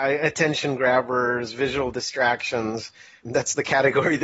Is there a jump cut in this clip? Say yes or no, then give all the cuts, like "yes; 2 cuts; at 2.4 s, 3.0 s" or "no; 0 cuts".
yes; 1 cut; at 3.2 s